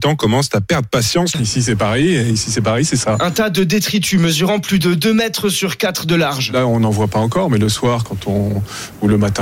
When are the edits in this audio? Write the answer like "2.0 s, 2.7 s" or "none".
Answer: 1.3 s